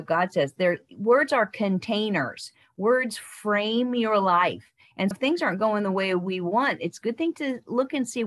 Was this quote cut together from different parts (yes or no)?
yes